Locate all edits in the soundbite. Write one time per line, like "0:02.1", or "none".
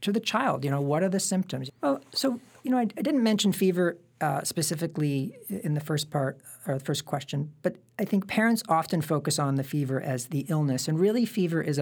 0:01.7